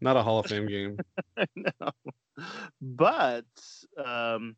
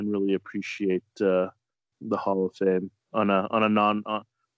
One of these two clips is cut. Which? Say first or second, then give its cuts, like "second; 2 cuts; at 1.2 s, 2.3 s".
second; 1 cut; at 1.9 s